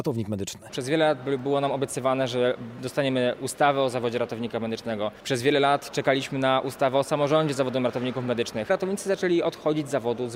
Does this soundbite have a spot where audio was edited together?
no; 0 cuts

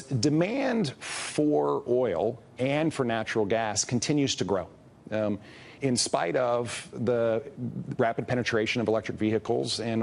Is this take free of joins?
no; 1 cut; at 5.8 s

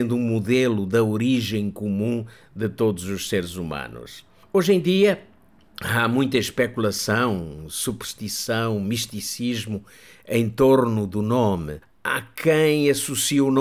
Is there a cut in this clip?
no; 0 cuts

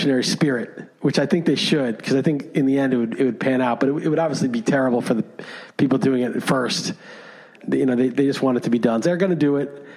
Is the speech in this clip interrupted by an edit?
yes; 2 cuts; at 7.6 s, 9.0 s

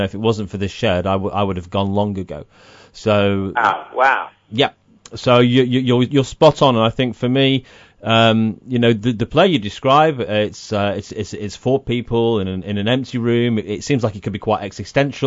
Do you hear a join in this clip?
no; 0 cuts

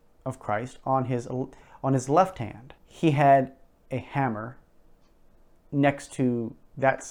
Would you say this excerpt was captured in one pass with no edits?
no; 1 cut; at 2.8 s

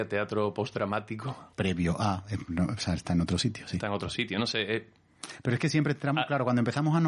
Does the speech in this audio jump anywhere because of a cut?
yes; 1 cut; at 1.5 s

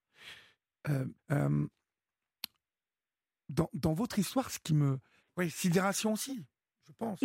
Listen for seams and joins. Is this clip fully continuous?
no; 2 cuts; at 1.2 s, 5.2 s

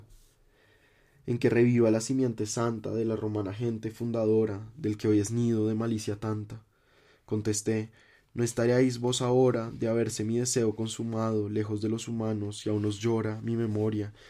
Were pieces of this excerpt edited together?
no; 0 cuts

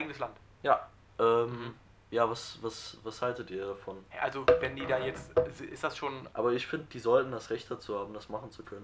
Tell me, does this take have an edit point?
yes; 2 cuts; at 1.1 s, 6.3 s

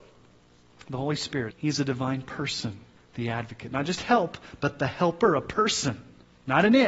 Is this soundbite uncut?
no; 2 cuts; at 1.5 s, 3.0 s

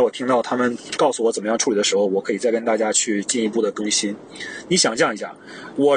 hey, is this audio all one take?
no; 1 cut; at 4.7 s

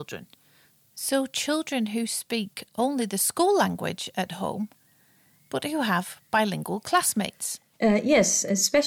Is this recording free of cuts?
yes; 0 cuts

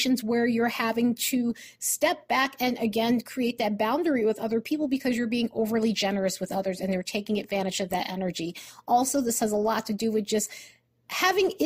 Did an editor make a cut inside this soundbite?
no; 0 cuts

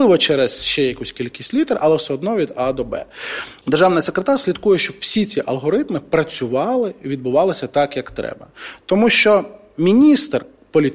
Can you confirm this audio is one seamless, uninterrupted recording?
yes; 0 cuts

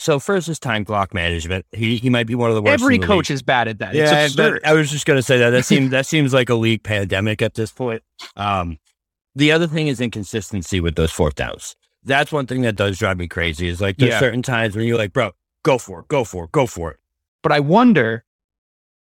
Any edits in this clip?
yes; 1 cut; at 17.3 s

